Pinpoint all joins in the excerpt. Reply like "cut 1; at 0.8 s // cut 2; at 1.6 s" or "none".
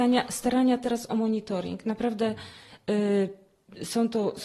none